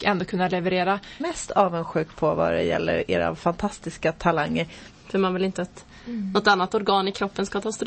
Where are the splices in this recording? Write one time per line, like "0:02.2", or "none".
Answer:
0:01.2
0:04.9

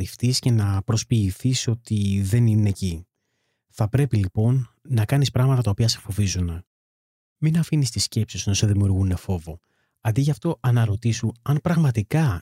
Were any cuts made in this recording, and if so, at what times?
none

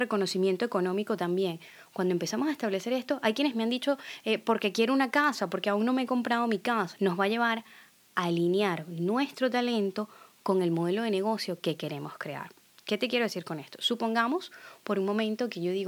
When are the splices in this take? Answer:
0:06.9

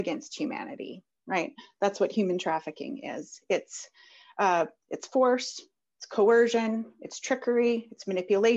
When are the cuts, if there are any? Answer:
none

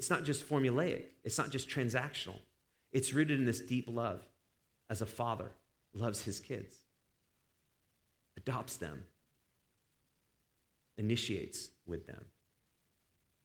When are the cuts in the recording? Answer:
0:08.3

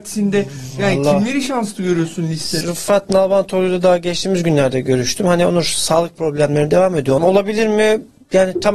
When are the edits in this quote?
0:02.6
0:07.2

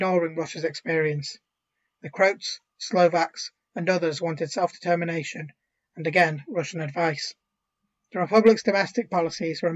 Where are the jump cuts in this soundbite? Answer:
0:05.8

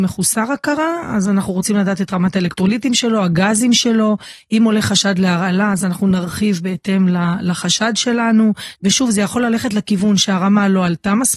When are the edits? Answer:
0:08.7

